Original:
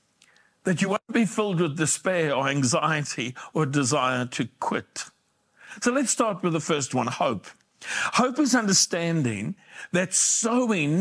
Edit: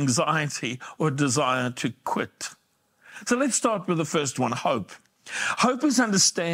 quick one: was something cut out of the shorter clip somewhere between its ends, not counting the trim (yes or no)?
no